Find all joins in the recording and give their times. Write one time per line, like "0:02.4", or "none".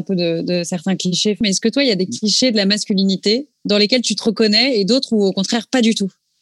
0:01.4